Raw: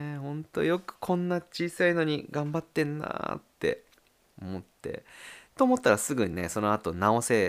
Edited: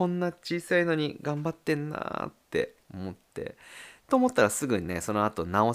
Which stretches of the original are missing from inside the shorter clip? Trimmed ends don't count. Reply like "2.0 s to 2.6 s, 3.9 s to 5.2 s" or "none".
3.9 s to 4.3 s